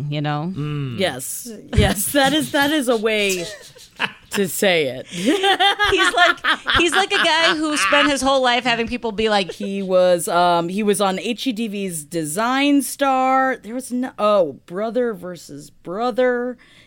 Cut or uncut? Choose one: cut